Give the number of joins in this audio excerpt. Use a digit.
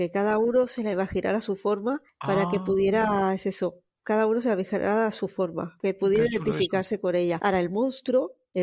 0